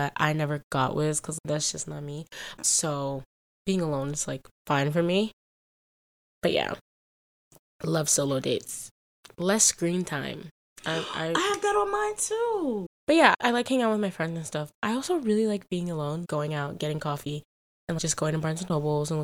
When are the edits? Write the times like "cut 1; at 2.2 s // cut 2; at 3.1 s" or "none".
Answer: cut 1; at 2.6 s // cut 2; at 12.9 s // cut 3; at 14.7 s